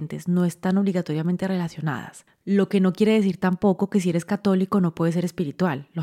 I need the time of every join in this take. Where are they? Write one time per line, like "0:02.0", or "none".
none